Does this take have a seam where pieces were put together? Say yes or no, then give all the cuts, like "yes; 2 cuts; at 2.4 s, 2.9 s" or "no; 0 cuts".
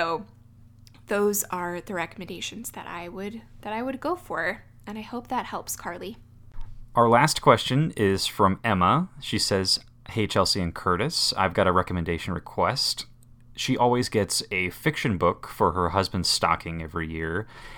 no; 0 cuts